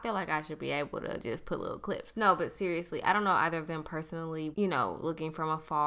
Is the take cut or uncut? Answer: cut